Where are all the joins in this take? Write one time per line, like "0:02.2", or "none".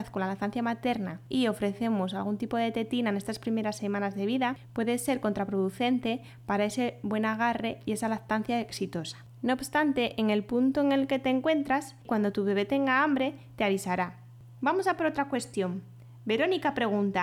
none